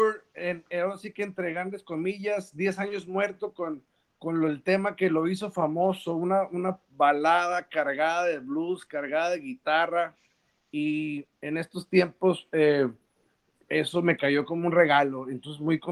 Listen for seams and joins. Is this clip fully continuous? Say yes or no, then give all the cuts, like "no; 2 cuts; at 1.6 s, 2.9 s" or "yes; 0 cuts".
yes; 0 cuts